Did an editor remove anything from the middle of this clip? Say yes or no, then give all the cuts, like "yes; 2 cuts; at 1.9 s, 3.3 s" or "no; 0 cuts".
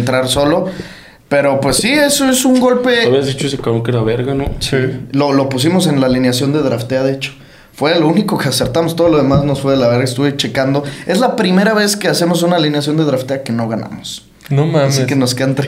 no; 0 cuts